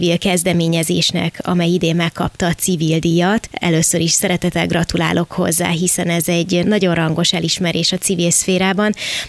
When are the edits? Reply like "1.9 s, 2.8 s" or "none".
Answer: 6.6 s